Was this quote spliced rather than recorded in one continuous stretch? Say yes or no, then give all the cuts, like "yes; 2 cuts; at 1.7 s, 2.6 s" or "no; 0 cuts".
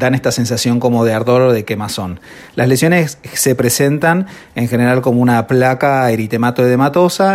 yes; 1 cut; at 2.5 s